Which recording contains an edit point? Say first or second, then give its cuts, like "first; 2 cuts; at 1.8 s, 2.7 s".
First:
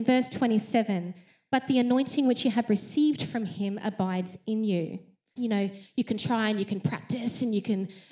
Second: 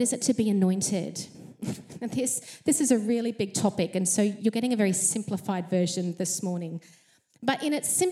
first; 1 cut; at 5.4 s